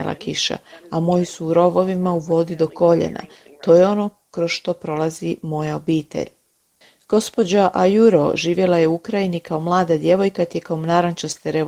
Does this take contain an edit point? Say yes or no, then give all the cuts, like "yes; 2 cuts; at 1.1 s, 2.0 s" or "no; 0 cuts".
no; 0 cuts